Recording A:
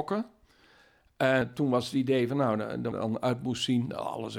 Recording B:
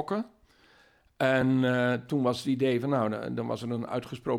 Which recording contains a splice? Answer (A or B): A